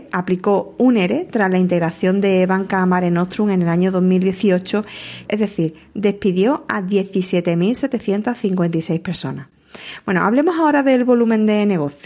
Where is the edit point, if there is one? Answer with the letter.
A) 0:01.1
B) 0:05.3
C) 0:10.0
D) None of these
B